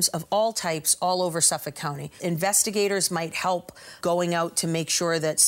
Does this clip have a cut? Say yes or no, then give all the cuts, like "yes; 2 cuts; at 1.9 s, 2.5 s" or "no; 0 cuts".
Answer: yes; 2 cuts; at 2.2 s, 4.0 s